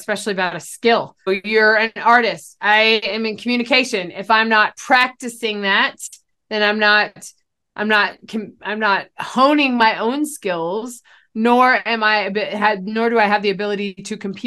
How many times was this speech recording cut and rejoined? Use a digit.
1